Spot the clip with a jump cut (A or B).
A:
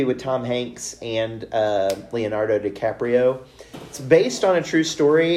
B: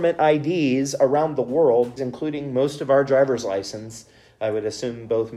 B